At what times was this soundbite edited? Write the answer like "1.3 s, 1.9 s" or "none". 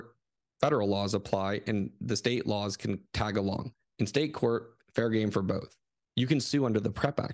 6.1 s